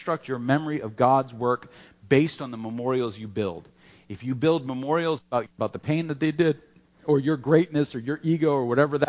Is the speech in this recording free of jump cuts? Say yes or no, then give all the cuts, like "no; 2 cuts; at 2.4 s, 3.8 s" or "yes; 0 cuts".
no; 1 cut; at 5.5 s